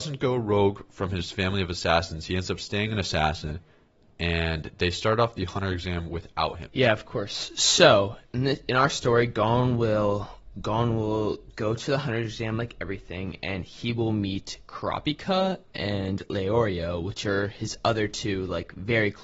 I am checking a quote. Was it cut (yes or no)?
yes